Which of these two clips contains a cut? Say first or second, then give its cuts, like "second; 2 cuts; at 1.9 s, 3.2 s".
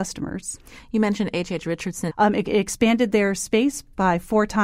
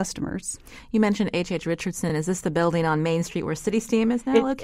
first; 1 cut; at 2.1 s